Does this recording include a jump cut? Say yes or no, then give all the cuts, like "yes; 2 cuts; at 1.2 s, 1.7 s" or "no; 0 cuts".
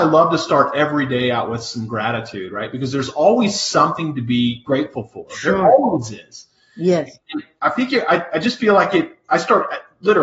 no; 0 cuts